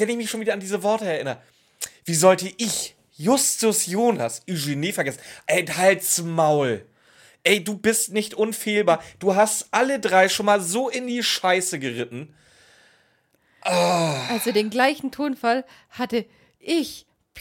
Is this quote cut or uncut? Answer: uncut